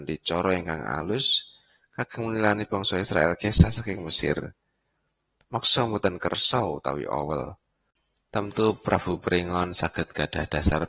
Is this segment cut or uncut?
uncut